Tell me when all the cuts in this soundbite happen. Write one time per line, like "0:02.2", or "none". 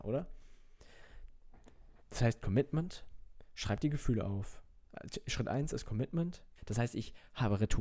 0:02.0
0:06.6

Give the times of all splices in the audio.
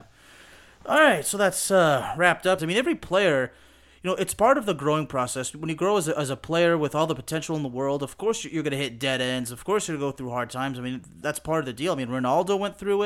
0:02.6
0:11.2

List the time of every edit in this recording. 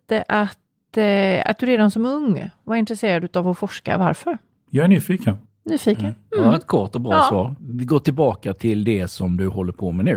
0:07.6

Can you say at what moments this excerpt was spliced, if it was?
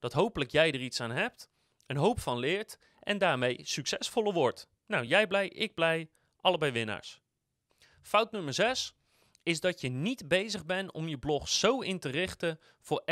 none

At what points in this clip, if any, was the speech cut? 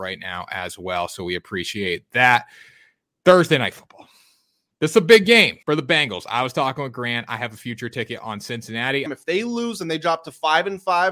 0:05.6
0:09.1

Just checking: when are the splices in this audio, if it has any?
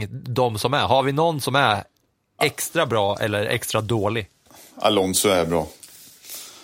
none

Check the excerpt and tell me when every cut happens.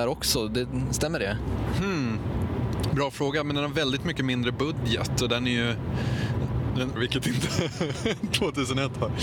0:07.0

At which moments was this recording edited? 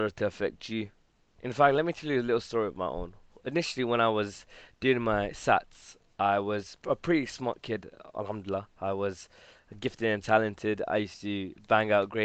none

